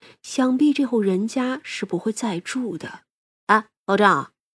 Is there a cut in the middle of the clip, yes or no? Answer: yes